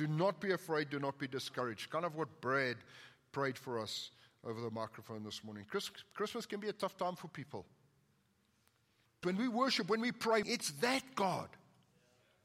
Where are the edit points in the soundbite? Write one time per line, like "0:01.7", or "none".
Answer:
0:09.2
0:10.4